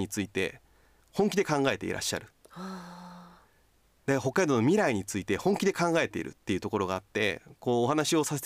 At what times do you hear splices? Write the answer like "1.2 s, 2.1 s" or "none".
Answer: none